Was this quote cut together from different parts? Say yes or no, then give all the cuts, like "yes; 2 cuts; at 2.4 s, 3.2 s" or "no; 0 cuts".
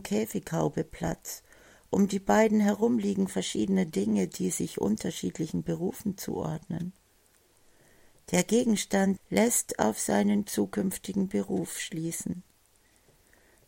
yes; 1 cut; at 9.2 s